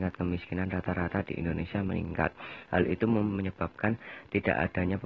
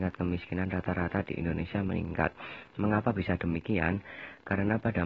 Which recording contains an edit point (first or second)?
first